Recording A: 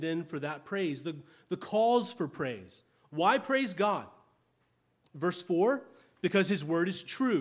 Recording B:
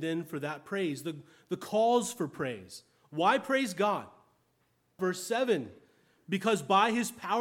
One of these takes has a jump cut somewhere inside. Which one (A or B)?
B